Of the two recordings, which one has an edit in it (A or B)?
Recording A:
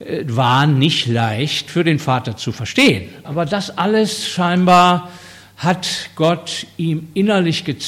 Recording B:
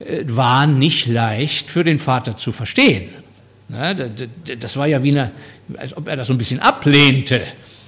A